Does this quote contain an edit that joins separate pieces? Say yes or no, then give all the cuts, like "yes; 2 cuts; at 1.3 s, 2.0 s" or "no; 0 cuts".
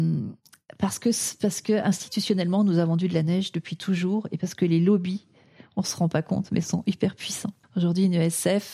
yes; 1 cut; at 7.6 s